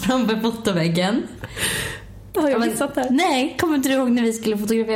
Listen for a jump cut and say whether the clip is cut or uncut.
cut